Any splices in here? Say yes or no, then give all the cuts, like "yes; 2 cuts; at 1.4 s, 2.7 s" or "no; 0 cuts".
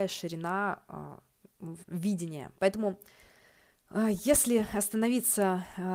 yes; 1 cut; at 2.6 s